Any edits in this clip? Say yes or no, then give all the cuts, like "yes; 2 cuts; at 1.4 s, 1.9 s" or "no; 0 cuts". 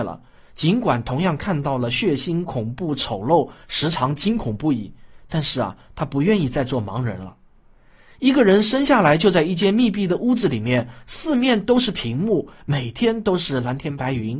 no; 0 cuts